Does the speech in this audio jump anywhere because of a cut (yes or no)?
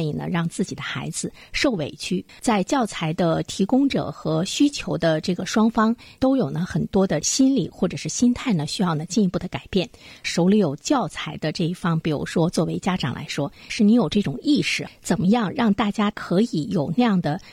yes